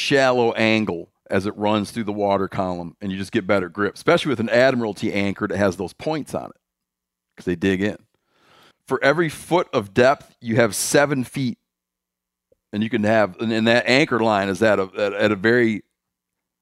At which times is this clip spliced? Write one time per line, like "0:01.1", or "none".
0:08.7